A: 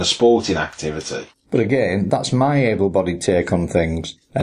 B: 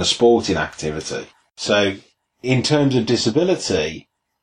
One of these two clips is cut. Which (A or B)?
A